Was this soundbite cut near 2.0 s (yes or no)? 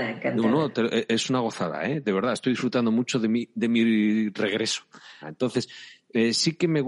no